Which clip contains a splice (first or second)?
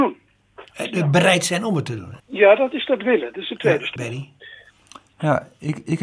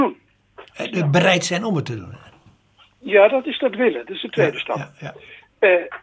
first